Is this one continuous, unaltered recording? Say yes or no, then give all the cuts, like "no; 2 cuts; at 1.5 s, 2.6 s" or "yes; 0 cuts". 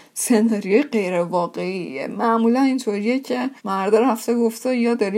no; 1 cut; at 3.6 s